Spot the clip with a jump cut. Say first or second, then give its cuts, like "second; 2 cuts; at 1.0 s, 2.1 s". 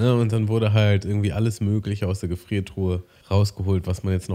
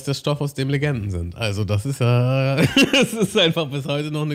first; 1 cut; at 3.2 s